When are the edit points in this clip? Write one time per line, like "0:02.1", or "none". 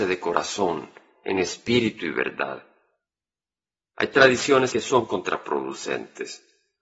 0:04.7

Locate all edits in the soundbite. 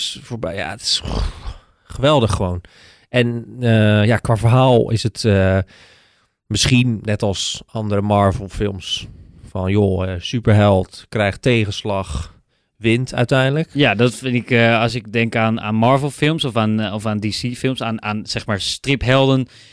none

